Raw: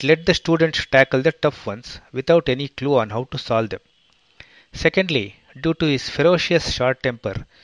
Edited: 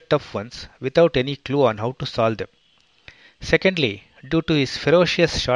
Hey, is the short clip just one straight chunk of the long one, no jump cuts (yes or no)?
yes